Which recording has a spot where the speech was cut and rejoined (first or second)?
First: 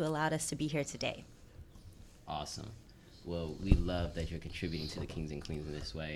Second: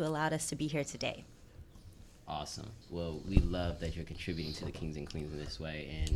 second